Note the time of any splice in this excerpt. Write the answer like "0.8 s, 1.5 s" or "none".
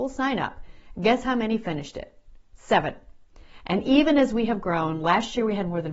none